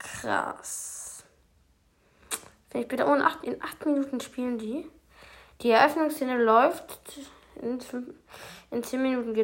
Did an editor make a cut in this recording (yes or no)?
yes